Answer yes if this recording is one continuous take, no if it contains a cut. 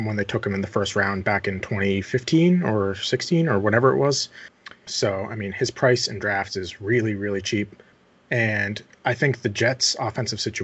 no